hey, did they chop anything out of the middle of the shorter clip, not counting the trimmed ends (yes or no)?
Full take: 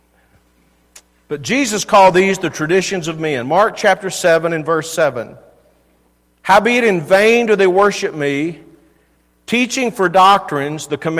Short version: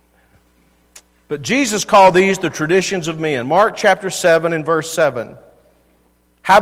no